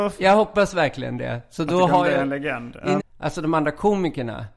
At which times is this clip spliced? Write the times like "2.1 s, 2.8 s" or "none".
3.0 s

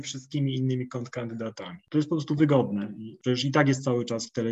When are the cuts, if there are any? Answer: none

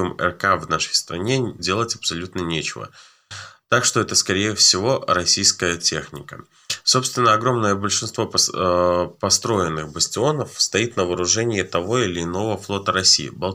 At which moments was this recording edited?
1.6 s

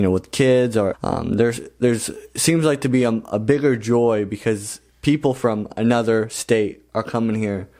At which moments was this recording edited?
0.9 s

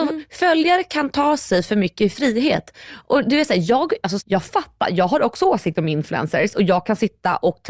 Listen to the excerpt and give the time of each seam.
4.2 s

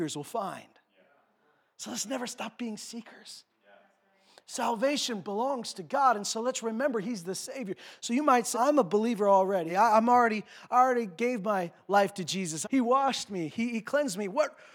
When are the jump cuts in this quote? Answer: 8.5 s, 9.7 s, 12.6 s

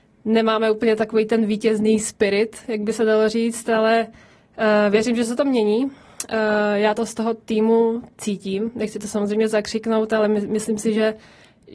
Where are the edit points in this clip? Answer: none

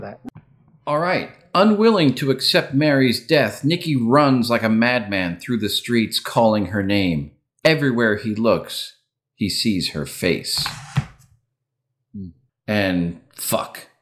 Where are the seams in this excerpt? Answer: 12.5 s

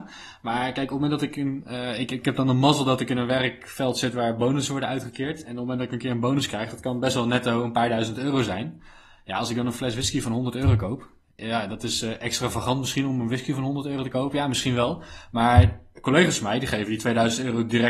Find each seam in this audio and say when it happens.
none

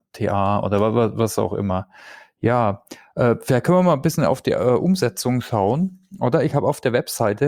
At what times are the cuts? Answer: none

